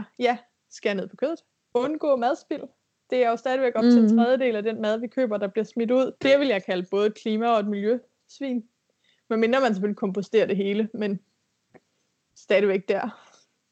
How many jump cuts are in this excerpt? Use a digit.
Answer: 1